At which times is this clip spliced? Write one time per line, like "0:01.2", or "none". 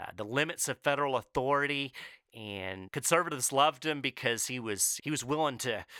0:02.9
0:05.0